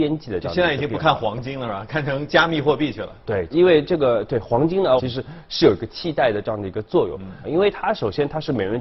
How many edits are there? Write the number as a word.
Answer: three